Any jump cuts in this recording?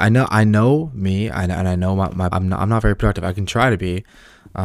yes; 1 cut; at 2.3 s

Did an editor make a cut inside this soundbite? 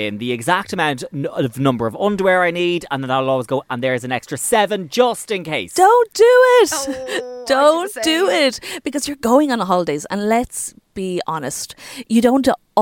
no; 0 cuts

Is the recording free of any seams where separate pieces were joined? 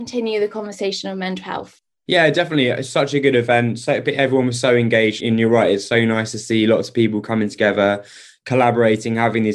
yes; 0 cuts

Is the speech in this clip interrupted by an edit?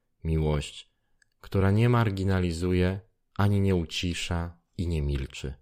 no; 0 cuts

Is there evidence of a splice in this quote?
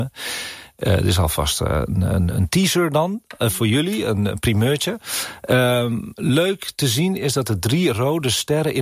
no; 0 cuts

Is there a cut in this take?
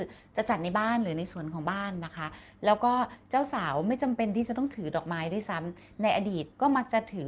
no; 0 cuts

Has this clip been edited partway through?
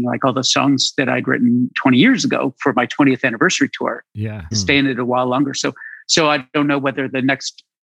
yes; 1 cut; at 4.5 s

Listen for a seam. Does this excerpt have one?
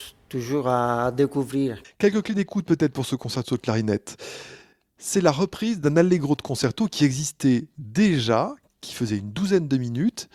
no; 0 cuts

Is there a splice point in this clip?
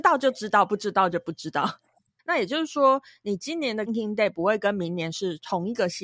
yes; 2 cuts; at 2.2 s, 3.9 s

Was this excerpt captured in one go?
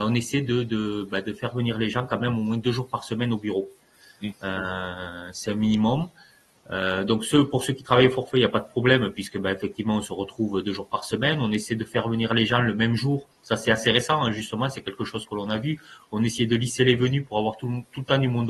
yes; 0 cuts

